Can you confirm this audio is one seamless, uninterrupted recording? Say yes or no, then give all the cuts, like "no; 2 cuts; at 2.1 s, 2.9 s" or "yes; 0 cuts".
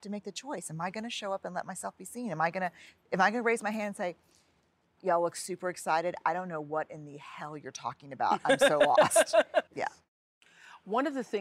no; 2 cuts; at 5.0 s, 9.7 s